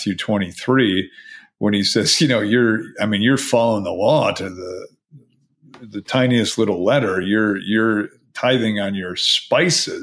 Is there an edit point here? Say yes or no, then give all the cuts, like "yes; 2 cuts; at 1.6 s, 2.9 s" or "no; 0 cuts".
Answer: no; 0 cuts